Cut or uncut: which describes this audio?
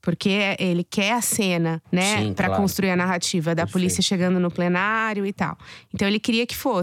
uncut